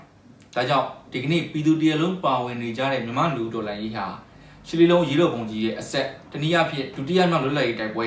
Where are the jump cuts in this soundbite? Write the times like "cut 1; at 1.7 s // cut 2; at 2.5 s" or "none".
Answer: cut 1; at 6.3 s